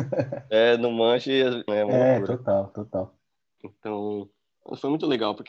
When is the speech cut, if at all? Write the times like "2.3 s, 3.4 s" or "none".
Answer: 1.7 s, 3.6 s

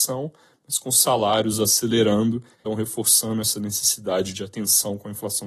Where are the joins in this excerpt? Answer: 2.7 s

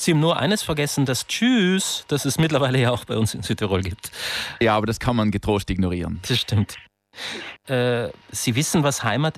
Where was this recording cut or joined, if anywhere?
7.6 s

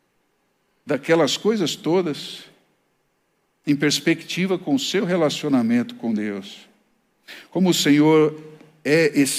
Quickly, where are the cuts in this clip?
none

